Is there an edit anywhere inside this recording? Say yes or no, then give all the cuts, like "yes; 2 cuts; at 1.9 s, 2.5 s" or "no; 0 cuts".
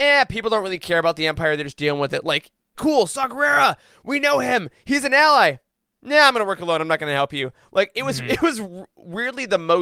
yes; 1 cut; at 2.7 s